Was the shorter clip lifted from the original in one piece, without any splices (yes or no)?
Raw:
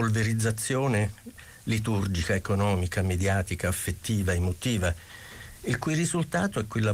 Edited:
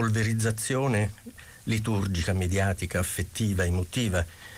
no